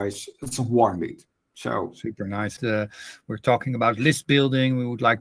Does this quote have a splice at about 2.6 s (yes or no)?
yes